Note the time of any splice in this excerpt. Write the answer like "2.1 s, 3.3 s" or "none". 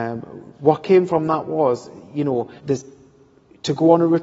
2.6 s